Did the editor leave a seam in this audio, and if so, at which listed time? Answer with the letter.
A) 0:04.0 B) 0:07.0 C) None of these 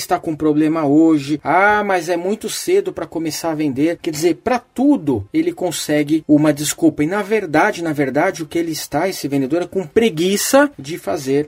A